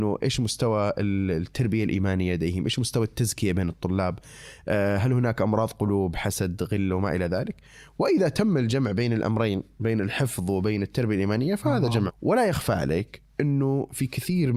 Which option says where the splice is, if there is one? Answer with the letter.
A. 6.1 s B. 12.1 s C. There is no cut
B